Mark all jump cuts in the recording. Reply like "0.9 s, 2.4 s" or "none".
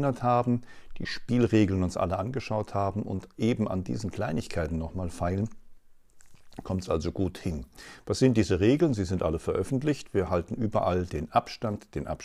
none